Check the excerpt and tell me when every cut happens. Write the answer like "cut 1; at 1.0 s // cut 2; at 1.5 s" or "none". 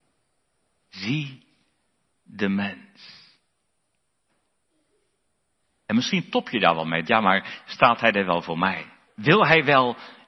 cut 1; at 7.0 s // cut 2; at 9.1 s